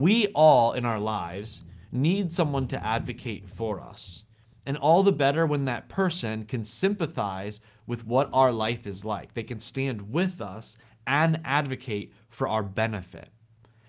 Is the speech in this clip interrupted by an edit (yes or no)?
no